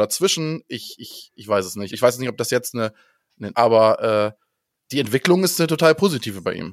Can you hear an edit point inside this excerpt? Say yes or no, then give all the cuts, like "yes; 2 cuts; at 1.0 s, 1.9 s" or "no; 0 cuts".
yes; 2 cuts; at 1.9 s, 3.5 s